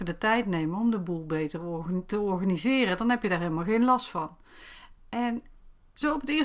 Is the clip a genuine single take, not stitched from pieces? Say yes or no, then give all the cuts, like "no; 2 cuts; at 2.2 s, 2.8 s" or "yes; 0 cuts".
yes; 0 cuts